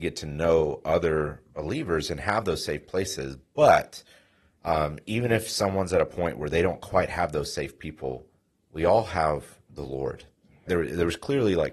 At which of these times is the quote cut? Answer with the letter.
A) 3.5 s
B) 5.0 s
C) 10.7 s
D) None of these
C